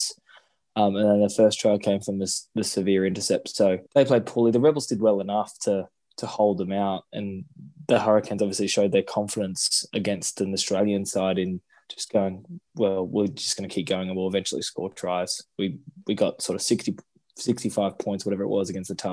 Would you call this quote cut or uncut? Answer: cut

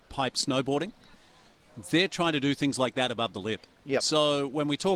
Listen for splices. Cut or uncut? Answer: uncut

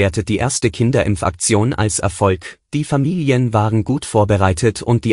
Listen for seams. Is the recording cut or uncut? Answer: uncut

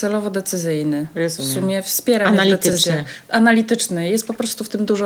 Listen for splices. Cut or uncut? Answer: uncut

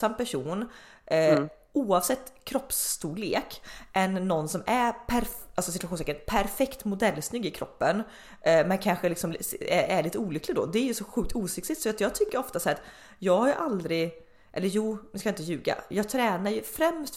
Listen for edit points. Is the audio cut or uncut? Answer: uncut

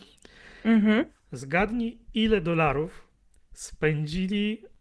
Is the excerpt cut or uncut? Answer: uncut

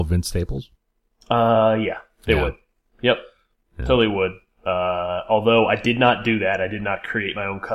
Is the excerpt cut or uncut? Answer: uncut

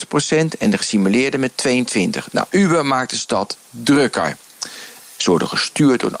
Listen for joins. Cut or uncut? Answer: cut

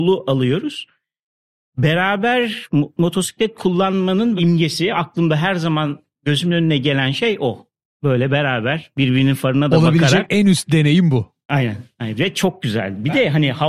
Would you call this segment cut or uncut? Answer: uncut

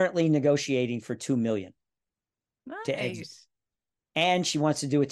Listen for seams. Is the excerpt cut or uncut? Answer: uncut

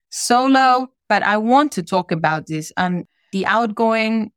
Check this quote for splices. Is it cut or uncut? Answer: cut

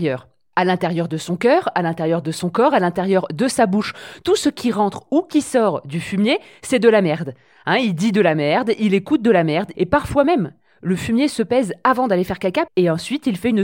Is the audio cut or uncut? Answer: cut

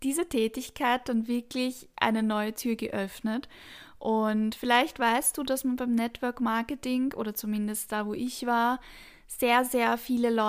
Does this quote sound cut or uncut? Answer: uncut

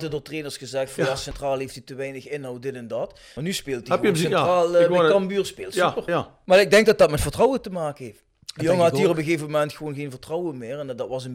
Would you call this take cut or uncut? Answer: cut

